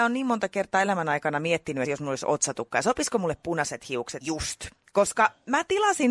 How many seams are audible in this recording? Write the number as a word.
two